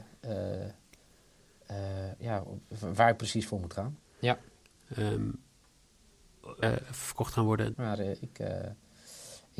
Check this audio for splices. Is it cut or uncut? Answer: cut